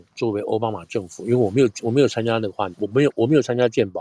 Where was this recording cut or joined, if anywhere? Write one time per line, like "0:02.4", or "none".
0:02.7